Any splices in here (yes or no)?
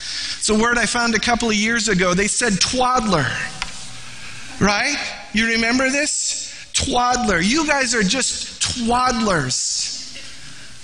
no